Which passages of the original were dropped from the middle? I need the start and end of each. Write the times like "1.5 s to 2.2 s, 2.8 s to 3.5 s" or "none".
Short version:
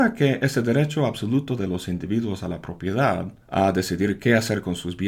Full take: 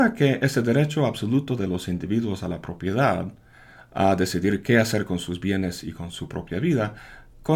3.4 s to 3.8 s

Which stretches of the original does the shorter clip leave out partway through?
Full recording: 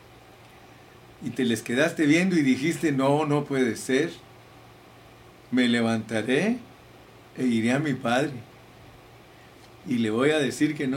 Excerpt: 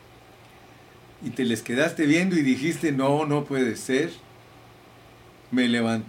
none

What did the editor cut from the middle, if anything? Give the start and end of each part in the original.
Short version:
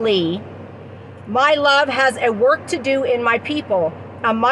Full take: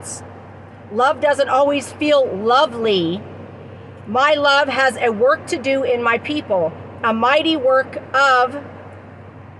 none

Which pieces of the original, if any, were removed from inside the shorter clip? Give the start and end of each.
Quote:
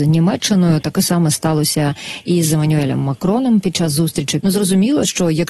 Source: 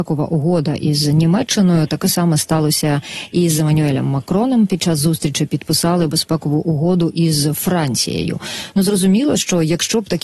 5.5 s to 8.7 s

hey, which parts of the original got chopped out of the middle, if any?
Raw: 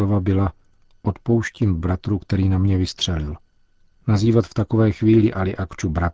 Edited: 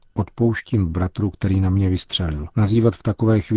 3.4 s to 4.0 s

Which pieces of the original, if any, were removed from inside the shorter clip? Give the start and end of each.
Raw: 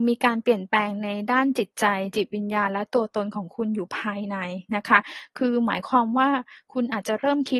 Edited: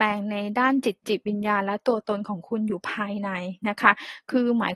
1.8 s to 2.1 s

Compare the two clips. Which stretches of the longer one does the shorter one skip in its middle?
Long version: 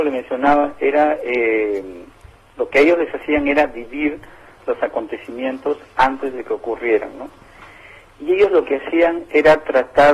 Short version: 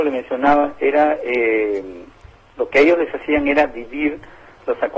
none

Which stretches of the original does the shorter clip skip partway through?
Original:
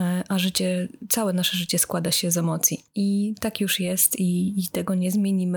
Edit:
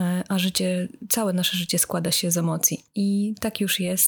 none

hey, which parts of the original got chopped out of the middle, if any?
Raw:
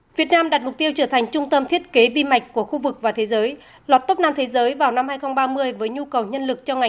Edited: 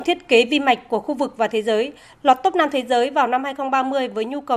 none

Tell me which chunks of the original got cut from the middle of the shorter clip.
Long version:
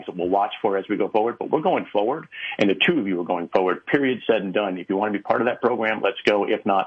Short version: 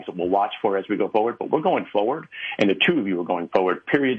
none

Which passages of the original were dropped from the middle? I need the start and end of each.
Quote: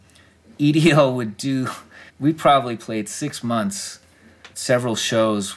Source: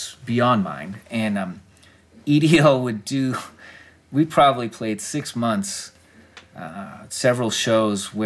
3.8 s to 4.0 s, 6.5 s to 7.1 s

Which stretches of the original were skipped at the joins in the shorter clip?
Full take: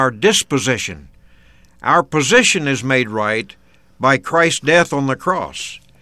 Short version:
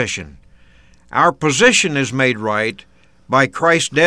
none

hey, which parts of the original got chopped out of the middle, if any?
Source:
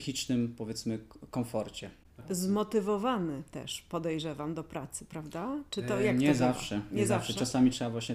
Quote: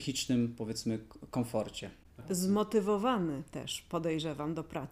none

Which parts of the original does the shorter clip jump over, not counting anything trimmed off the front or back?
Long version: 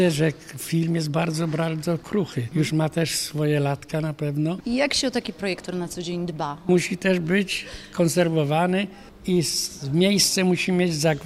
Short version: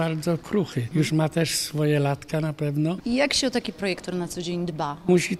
none

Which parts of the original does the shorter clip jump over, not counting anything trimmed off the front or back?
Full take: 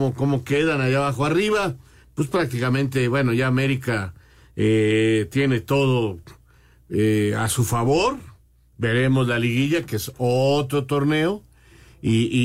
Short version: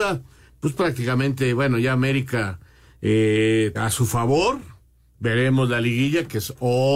5.3 s to 7.3 s

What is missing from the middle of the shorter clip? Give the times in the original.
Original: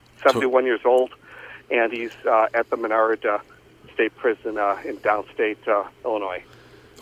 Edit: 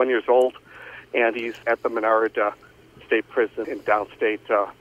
2.2 s to 2.5 s, 4.5 s to 4.8 s

